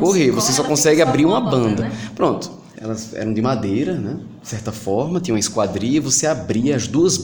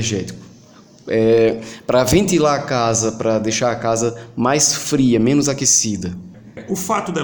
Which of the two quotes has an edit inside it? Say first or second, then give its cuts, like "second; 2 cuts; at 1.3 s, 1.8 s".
first; 1 cut; at 2.8 s